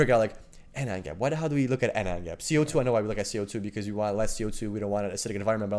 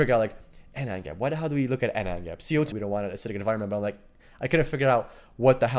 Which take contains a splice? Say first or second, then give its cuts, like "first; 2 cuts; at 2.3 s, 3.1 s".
second; 1 cut; at 2.7 s